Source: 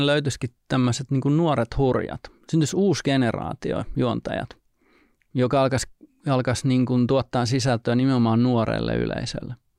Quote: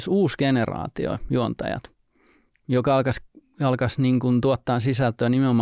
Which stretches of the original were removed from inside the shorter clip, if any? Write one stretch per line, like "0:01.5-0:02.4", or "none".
none